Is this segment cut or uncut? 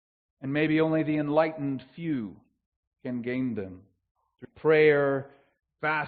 cut